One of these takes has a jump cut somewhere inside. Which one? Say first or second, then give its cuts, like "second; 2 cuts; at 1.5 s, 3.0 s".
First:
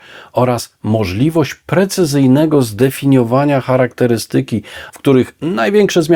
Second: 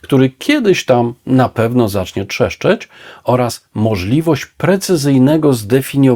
first; 1 cut; at 4.9 s